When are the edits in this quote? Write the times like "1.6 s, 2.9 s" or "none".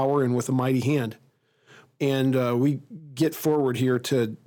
1.9 s